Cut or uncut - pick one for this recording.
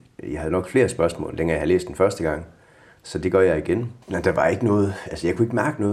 cut